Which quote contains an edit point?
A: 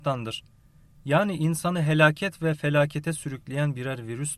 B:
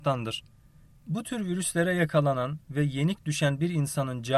B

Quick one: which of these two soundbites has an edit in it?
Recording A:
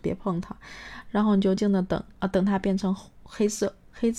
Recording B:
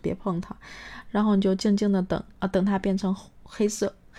A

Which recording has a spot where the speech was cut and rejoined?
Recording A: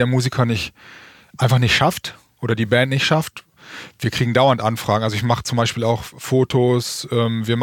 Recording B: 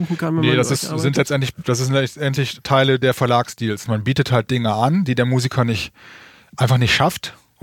B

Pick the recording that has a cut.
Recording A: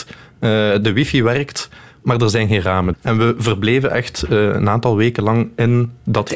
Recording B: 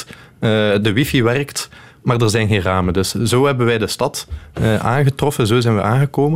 A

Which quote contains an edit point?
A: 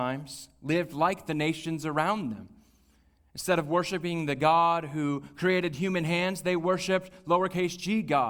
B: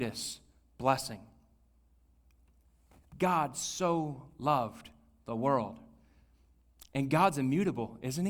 A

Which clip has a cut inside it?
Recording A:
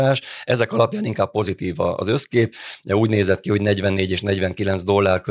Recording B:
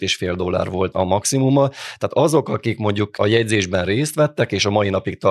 B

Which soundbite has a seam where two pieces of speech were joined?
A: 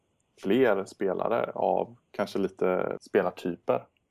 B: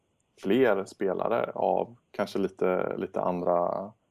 A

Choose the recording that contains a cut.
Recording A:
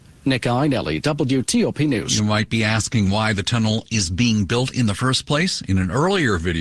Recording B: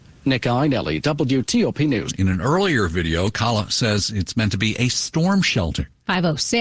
B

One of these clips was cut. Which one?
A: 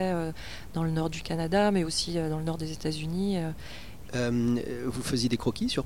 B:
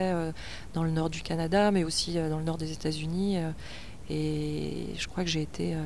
A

